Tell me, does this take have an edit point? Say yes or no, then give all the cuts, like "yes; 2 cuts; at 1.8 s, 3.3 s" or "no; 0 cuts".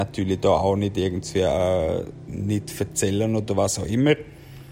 no; 0 cuts